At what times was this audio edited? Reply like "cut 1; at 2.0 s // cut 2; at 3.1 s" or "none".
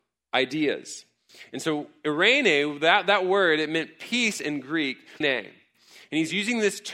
cut 1; at 5.2 s